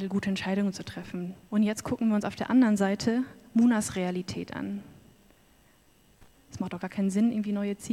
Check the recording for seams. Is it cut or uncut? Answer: cut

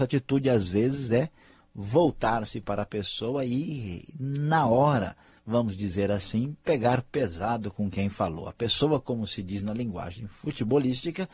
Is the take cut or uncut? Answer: uncut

